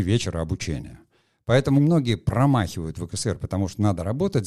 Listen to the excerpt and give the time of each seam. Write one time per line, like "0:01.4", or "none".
0:01.8